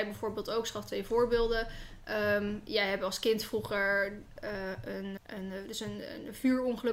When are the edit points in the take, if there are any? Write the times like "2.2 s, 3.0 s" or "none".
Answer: 5.2 s